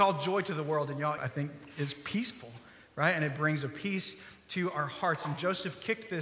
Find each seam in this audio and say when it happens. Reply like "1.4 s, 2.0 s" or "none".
1.2 s